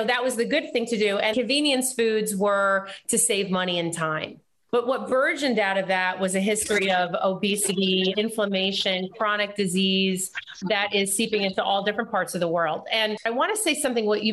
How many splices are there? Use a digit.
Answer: 2